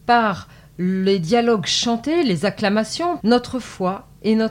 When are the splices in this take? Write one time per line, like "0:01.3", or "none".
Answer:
0:03.2